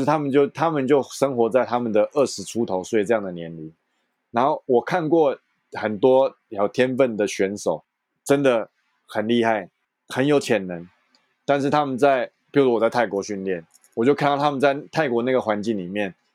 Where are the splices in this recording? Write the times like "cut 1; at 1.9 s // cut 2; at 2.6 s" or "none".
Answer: none